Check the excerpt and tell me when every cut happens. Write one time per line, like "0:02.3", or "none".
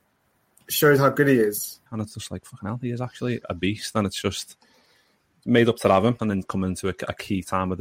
0:01.9
0:03.4
0:06.2